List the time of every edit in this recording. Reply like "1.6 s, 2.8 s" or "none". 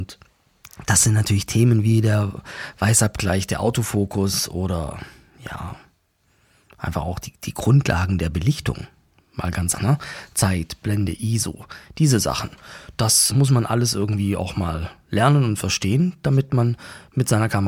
9.7 s, 13.3 s